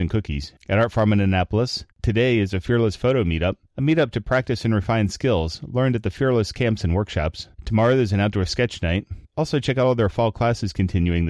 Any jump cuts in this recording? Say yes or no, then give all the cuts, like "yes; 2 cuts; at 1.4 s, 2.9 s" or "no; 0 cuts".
no; 0 cuts